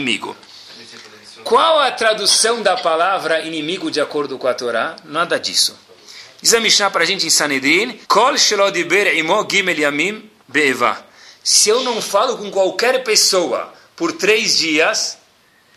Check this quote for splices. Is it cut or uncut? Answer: cut